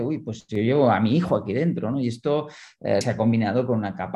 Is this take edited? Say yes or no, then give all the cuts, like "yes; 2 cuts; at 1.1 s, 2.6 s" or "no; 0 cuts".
yes; 2 cuts; at 1.9 s, 3.0 s